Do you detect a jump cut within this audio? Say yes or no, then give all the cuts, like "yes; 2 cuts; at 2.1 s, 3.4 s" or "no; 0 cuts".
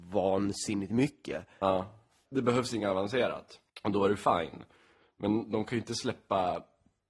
yes; 2 cuts; at 2.3 s, 3.7 s